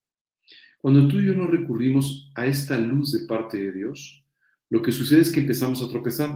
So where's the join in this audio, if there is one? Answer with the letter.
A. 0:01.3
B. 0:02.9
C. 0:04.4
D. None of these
D